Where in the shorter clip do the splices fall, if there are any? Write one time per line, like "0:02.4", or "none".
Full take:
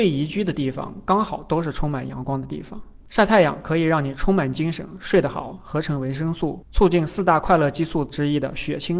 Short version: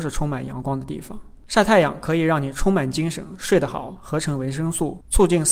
none

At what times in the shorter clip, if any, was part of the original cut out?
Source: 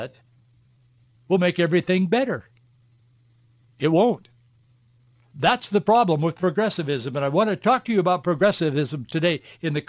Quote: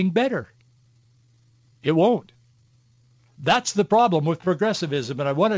none

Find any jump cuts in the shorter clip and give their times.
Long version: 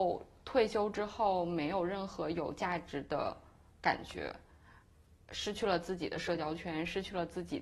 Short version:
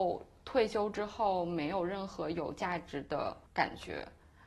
0:03.5

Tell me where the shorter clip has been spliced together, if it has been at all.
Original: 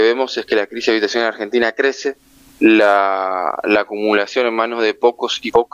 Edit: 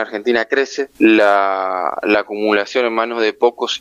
0:01.0

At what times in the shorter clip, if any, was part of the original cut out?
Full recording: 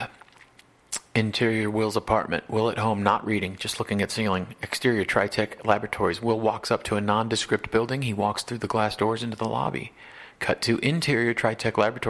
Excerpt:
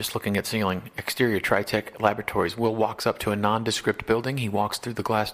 none

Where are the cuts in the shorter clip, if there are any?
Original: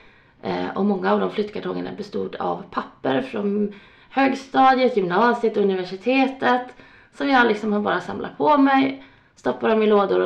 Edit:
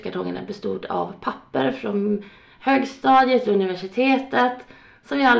0:03.4

